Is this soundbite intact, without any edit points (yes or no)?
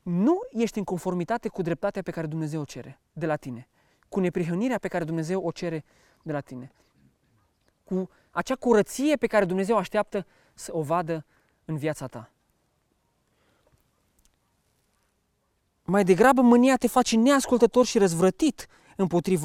yes